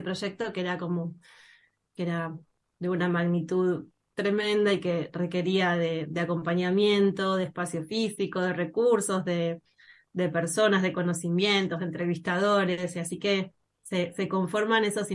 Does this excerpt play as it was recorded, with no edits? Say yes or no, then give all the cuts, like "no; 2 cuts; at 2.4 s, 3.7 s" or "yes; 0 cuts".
yes; 0 cuts